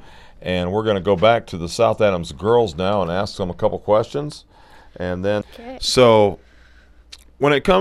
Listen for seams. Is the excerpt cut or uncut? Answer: cut